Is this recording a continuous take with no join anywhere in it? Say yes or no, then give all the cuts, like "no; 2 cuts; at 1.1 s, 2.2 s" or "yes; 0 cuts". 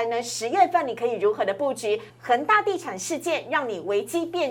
no; 1 cut; at 2.1 s